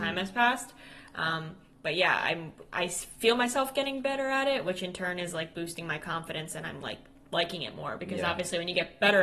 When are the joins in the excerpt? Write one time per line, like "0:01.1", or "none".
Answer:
none